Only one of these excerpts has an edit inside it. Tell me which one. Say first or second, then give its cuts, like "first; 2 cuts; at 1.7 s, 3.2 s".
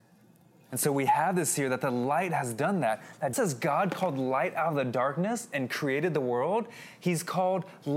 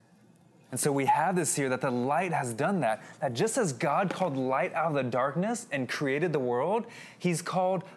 first; 1 cut; at 3.3 s